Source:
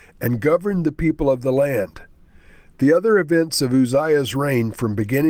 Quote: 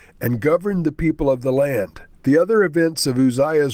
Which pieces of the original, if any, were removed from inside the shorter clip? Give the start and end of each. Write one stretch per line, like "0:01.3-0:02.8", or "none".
0:02.1-0:02.7

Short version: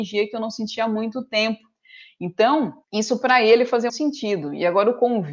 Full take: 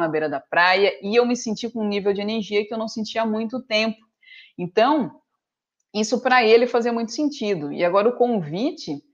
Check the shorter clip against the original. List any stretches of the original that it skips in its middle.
0:05.2-0:05.8
0:06.9-0:07.1

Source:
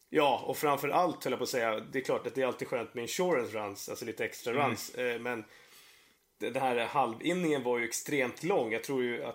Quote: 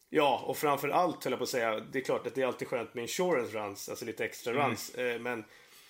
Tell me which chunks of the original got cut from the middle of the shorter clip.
none

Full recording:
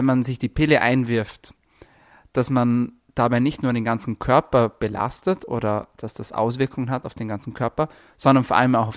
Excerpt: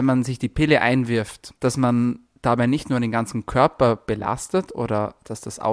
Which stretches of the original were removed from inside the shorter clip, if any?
0:01.6-0:02.3

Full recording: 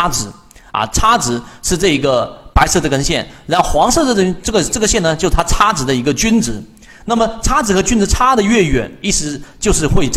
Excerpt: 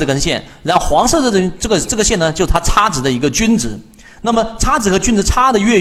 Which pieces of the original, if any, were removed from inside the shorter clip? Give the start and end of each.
none

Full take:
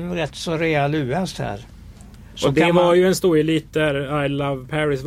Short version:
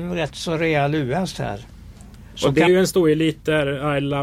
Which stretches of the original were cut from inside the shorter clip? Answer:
0:02.7-0:02.9

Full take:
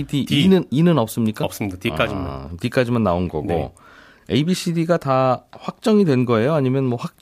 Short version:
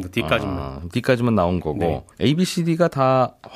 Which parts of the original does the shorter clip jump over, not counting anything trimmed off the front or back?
0:03.8-0:04.2

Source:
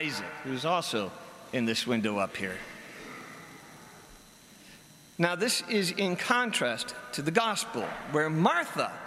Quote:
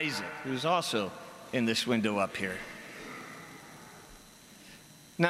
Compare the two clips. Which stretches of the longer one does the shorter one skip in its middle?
none

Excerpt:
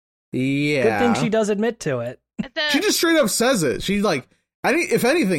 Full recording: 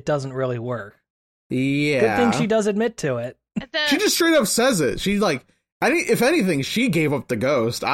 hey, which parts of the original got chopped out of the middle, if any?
none

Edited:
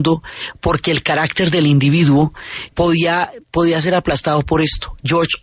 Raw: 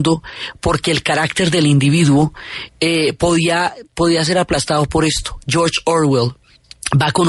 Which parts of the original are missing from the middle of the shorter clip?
0:02.7-0:03.2

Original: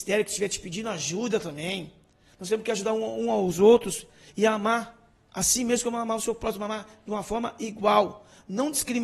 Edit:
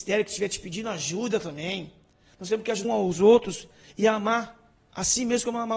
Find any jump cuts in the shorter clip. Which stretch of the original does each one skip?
0:02.8-0:03.2

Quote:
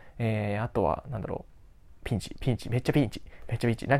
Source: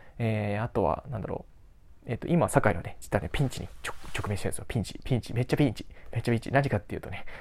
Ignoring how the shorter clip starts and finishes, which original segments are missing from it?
0:02.0-0:04.7

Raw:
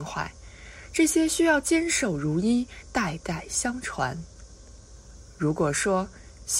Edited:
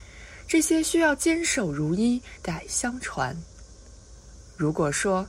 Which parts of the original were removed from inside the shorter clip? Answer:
0:02.9-0:03.2

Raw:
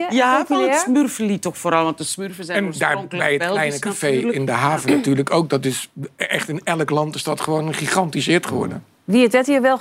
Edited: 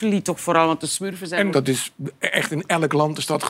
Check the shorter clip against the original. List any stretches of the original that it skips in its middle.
0:02.7-0:05.5

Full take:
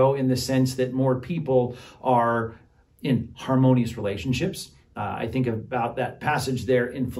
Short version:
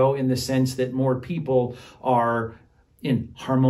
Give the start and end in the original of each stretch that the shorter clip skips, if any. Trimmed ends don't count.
none

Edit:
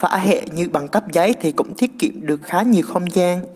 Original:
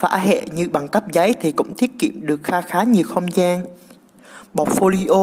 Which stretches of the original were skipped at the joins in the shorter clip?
0:02.4-0:02.6

